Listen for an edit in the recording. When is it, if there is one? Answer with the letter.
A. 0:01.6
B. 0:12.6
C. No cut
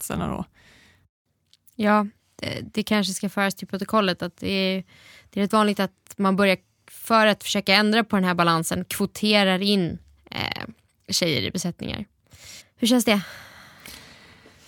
B